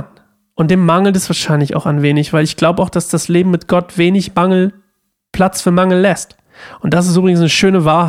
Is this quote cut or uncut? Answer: uncut